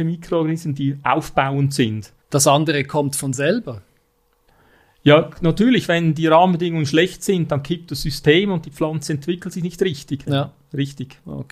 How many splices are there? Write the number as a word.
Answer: two